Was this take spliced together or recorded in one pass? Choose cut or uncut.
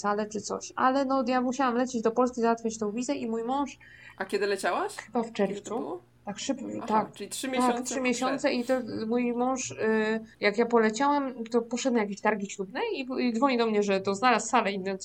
cut